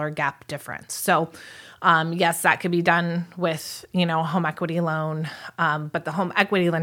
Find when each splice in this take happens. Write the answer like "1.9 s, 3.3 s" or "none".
none